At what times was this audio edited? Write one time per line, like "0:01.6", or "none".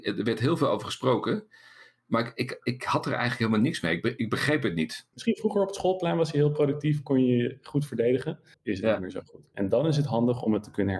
0:05.1
0:08.5